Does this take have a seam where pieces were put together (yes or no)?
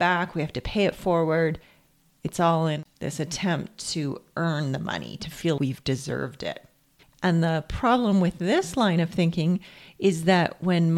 yes